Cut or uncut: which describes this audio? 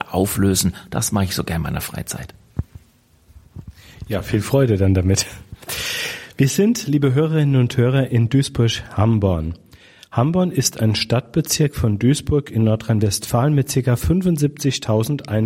uncut